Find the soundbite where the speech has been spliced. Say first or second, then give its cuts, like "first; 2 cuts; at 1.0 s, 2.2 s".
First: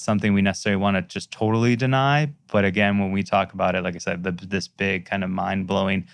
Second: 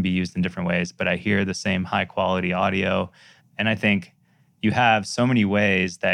second; 1 cut; at 3.4 s